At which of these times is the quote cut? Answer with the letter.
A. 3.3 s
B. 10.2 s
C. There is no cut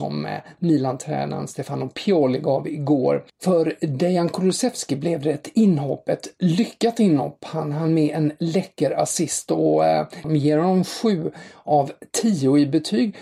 B